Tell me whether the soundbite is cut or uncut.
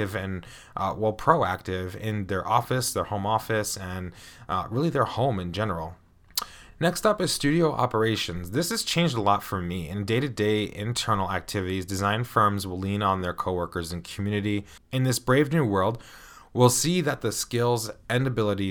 uncut